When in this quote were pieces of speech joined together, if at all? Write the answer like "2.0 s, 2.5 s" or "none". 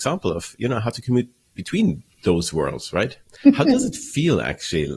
none